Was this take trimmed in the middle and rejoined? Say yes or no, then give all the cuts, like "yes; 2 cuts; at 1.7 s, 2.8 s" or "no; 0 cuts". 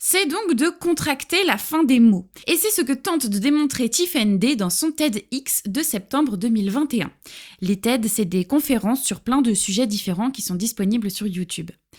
yes; 1 cut; at 2.4 s